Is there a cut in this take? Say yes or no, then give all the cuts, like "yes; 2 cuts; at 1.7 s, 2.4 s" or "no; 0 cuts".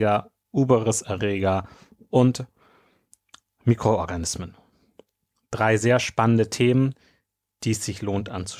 no; 0 cuts